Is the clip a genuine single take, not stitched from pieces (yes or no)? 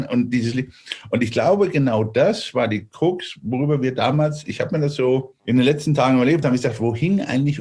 no